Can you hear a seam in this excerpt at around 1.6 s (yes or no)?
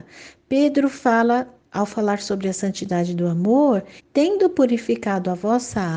no